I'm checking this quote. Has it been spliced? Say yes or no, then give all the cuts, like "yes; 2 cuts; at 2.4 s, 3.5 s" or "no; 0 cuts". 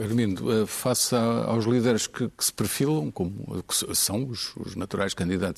no; 0 cuts